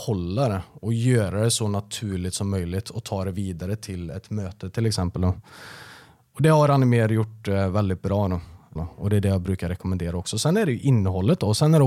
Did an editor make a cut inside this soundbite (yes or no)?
yes